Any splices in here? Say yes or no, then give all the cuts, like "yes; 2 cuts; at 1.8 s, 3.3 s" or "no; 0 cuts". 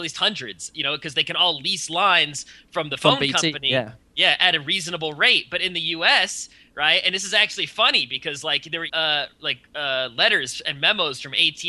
yes; 1 cut; at 8.9 s